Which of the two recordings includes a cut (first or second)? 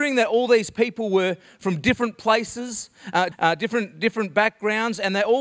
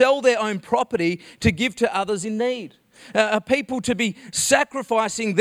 first